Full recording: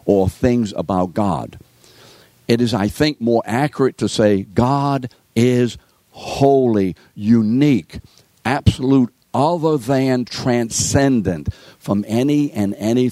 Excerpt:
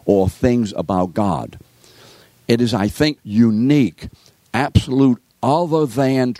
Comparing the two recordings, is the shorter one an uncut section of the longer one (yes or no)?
no